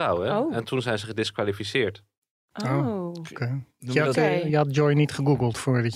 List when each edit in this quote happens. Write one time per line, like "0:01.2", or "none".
none